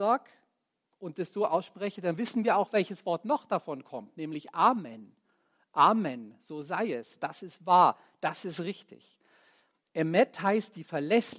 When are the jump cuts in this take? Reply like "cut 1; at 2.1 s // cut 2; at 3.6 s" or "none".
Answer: none